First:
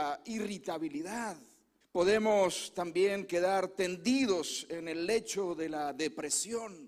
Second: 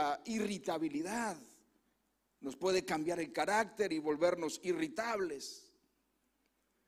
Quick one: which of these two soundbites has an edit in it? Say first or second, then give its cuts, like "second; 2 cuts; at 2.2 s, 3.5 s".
first; 1 cut; at 1.8 s